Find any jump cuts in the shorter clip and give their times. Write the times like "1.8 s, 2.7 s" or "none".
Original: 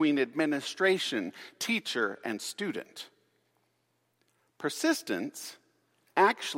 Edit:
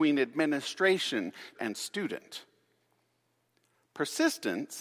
1.5 s